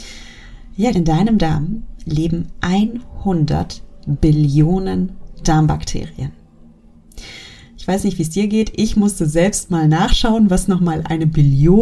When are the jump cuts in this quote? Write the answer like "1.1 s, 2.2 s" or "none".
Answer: 0.9 s

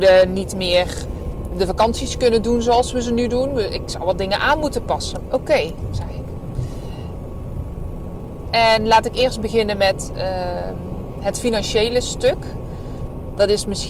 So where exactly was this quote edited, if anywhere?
5.2 s, 8.4 s

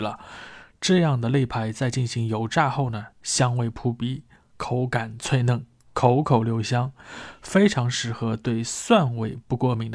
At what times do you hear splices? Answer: none

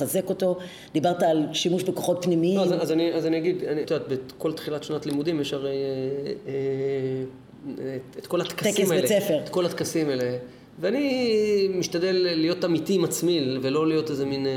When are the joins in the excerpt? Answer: 3.8 s

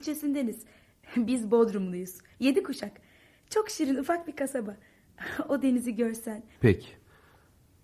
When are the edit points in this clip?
6.5 s

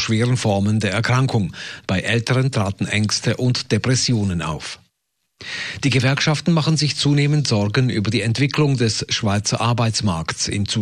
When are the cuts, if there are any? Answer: 1.9 s

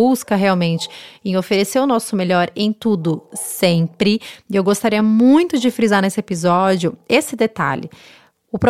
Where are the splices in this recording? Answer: none

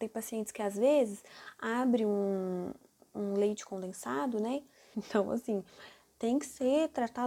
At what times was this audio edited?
4.9 s

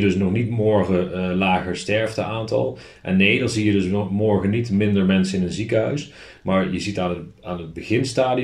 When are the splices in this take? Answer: none

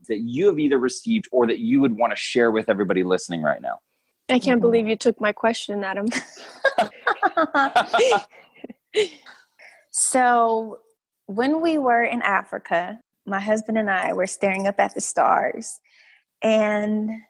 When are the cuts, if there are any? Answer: none

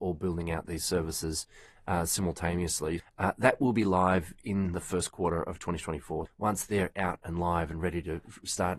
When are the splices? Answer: 3.0 s, 6.3 s

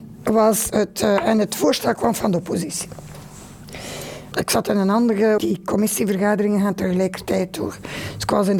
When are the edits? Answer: 4.3 s, 5.4 s

